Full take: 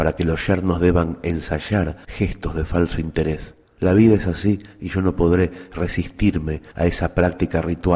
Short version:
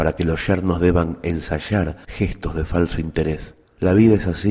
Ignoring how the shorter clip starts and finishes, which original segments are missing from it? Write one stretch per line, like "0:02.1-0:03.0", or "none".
none

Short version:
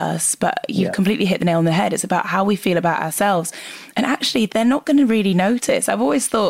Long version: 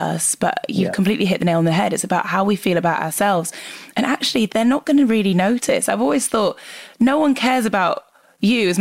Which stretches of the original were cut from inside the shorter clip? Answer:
none

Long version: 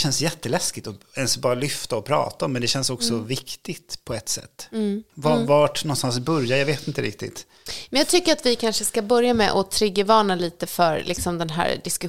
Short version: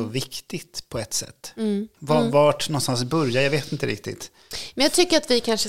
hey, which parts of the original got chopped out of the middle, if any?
none

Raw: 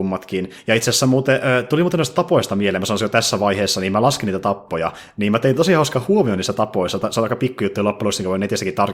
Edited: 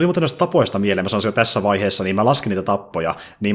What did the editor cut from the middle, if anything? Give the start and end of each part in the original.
none

